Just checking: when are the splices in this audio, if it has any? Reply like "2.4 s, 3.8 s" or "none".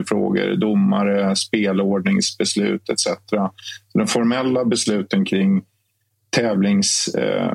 none